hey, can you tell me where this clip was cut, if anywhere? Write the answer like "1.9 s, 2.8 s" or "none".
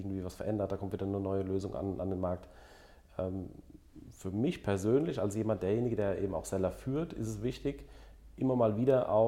none